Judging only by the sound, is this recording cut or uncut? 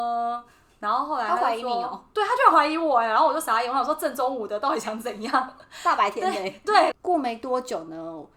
cut